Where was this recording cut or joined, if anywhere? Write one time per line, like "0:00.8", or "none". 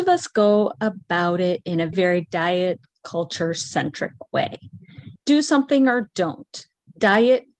0:01.9
0:05.2